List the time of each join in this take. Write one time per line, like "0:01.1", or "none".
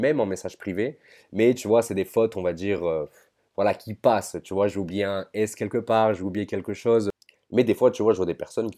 none